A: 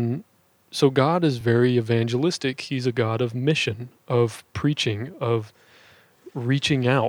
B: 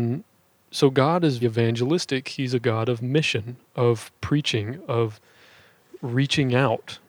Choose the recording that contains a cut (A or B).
B